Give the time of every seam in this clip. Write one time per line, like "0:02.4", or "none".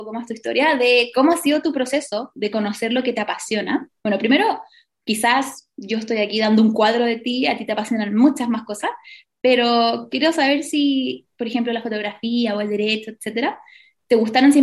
none